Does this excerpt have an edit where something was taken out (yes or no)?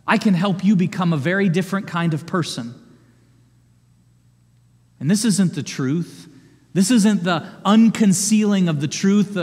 no